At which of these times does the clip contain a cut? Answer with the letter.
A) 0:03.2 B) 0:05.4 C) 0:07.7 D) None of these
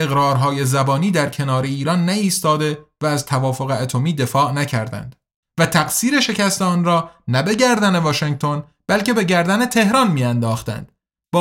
B